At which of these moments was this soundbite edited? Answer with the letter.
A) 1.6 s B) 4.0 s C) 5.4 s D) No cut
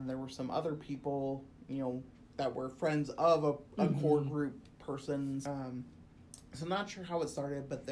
C